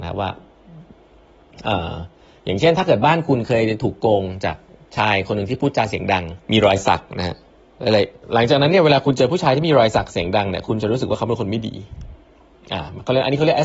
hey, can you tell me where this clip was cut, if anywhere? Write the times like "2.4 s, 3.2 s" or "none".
6.4 s